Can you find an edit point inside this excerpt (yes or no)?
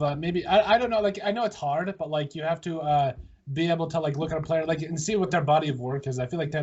no